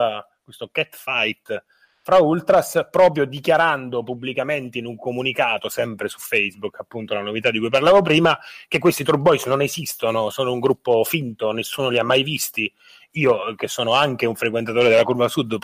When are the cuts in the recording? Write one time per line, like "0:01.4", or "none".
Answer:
none